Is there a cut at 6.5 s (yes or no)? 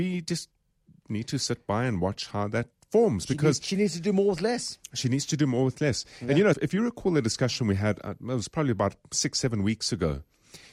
yes